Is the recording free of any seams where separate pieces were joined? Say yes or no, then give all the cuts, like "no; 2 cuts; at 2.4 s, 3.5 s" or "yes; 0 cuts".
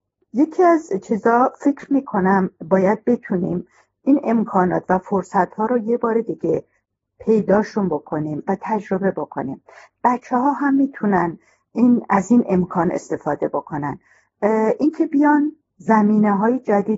yes; 0 cuts